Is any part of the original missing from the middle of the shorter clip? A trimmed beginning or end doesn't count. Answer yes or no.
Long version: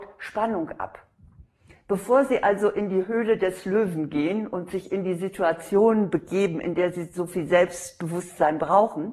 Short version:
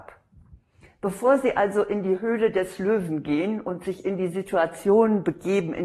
no